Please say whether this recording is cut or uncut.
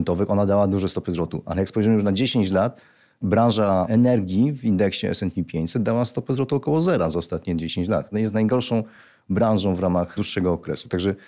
uncut